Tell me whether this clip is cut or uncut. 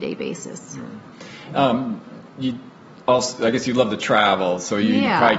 uncut